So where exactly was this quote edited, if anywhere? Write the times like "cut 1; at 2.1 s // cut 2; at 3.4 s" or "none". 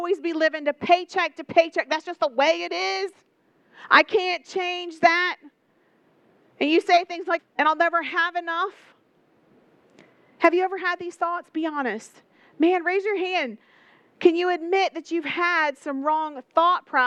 cut 1; at 7.4 s